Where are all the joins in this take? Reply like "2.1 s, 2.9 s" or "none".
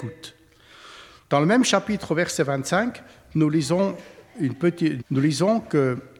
5.0 s